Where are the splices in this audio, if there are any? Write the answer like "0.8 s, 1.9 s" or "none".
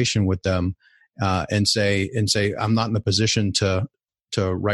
none